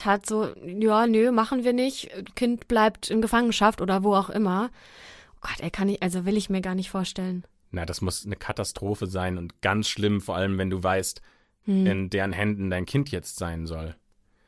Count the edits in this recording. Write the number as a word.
one